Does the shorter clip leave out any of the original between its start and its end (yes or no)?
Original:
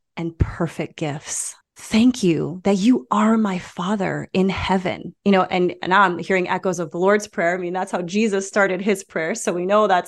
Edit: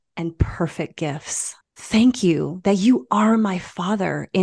no